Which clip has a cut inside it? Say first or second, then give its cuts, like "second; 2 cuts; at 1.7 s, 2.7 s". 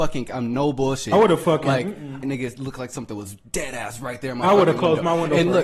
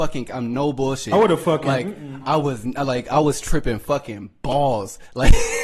first; 1 cut; at 2.2 s